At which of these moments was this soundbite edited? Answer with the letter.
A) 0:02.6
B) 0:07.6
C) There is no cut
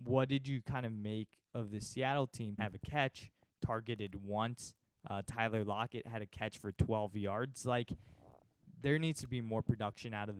A